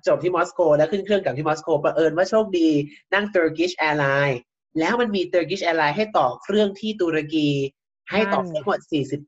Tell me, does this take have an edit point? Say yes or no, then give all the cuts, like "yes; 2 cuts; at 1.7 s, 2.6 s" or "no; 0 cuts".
no; 0 cuts